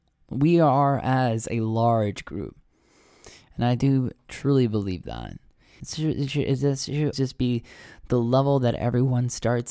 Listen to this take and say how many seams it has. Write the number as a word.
two